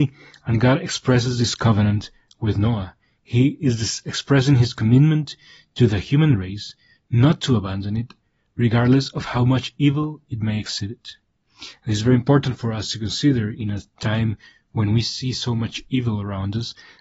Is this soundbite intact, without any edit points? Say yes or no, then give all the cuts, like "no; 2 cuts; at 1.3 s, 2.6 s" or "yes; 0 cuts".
yes; 0 cuts